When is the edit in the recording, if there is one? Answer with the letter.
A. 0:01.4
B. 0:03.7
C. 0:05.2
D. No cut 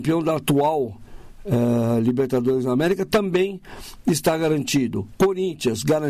D